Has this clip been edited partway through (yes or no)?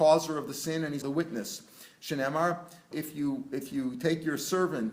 yes